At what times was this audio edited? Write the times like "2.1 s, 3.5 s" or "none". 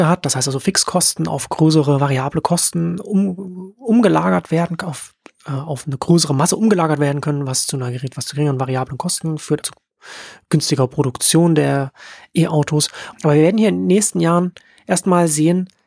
9.6 s, 13.1 s

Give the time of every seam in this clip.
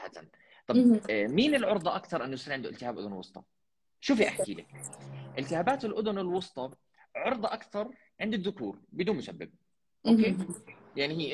4.0 s

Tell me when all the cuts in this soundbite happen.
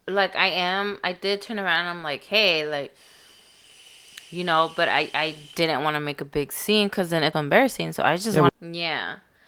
7.3 s, 8.5 s

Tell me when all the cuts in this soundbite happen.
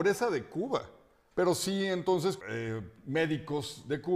1.3 s, 2.4 s

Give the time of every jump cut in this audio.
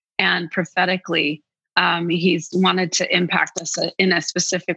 none

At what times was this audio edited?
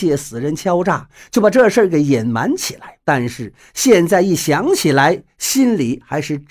3.0 s

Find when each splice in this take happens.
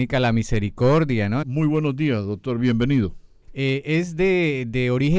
1.4 s, 3.4 s

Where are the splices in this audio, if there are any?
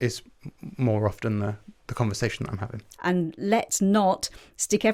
1.8 s, 2.9 s

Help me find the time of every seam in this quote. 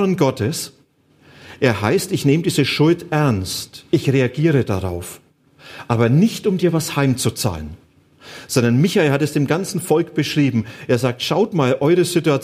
none

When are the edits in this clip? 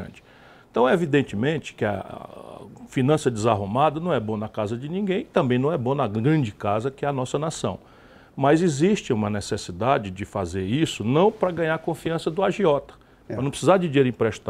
13.3 s

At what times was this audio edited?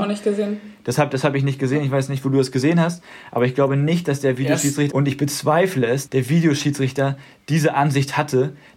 4.9 s, 6.1 s

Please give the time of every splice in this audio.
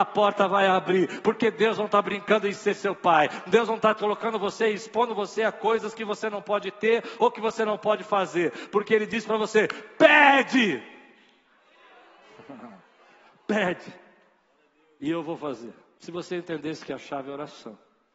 16.0 s

